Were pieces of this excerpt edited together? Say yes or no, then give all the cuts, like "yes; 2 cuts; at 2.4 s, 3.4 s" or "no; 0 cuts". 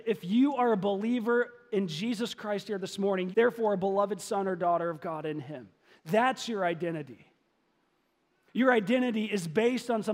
yes; 1 cut; at 3.3 s